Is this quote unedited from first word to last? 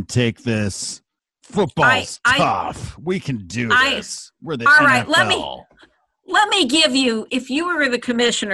no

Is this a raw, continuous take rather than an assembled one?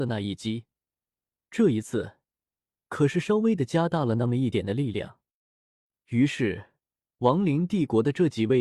no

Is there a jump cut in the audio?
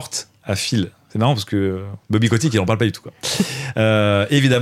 yes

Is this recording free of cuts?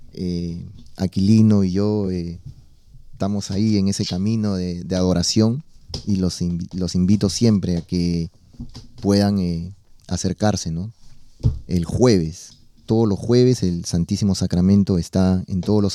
yes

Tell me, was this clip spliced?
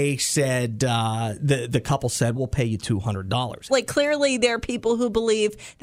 yes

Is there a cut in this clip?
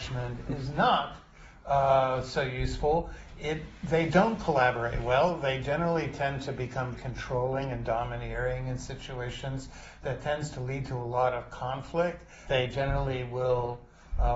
yes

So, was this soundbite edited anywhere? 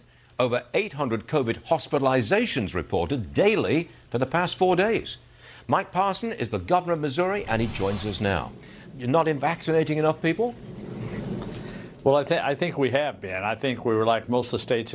yes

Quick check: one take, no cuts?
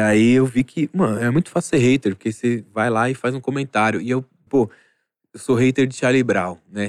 no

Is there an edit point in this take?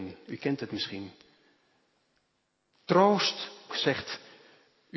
yes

